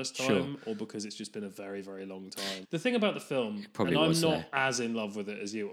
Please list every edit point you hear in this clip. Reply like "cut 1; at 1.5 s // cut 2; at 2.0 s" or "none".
cut 1; at 2.6 s